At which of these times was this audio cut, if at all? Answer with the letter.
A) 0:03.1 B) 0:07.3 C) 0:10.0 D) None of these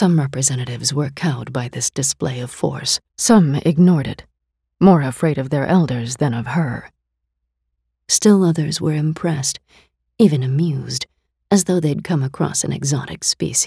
A